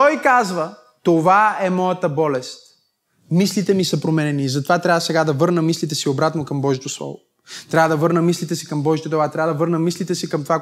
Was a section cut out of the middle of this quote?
no; 0 cuts

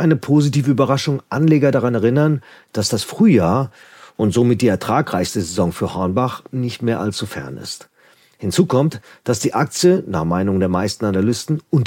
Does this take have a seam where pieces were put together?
no; 0 cuts

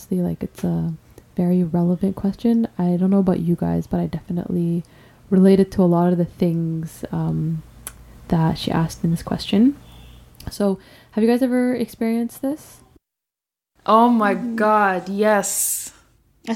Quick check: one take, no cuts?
yes; 0 cuts

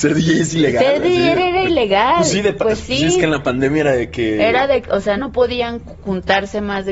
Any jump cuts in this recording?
yes; 1 cut; at 5.2 s

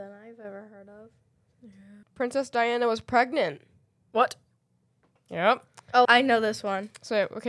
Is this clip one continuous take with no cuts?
no; 2 cuts; at 2.0 s, 6.0 s

